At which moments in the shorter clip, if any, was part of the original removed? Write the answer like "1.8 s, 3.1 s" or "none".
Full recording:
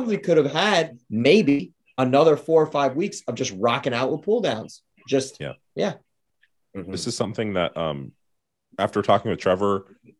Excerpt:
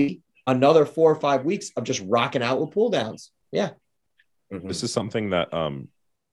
3.4 s